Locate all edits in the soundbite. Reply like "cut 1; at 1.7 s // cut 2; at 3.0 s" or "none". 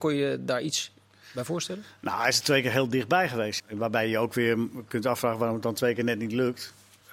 cut 1; at 3.6 s // cut 2; at 4.9 s